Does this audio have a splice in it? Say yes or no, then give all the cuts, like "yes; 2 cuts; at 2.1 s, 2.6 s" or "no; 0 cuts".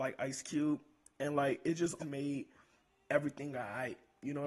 yes; 1 cut; at 2.0 s